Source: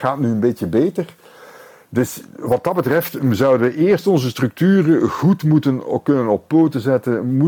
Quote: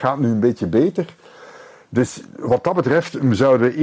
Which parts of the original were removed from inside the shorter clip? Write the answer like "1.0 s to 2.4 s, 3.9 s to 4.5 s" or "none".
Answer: none